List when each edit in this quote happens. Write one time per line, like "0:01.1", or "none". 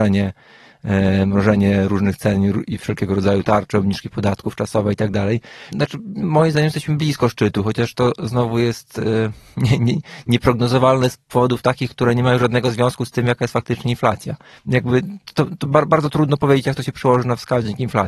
0:05.7
0:14.5